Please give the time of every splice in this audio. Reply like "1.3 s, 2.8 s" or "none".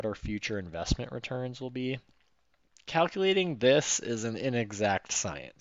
2.8 s